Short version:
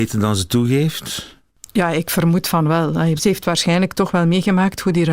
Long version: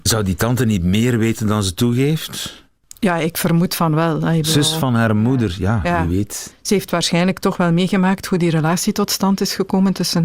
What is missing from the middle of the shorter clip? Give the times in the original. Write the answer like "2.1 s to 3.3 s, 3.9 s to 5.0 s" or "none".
4.4 s to 6.6 s